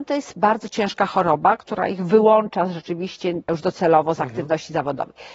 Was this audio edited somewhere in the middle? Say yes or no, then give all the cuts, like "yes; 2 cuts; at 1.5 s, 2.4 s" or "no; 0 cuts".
yes; 1 cut; at 3.5 s